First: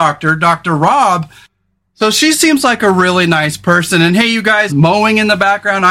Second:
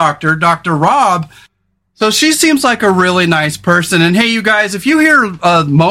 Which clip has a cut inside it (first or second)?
first